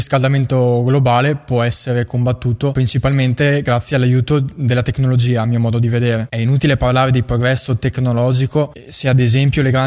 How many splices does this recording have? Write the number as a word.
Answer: one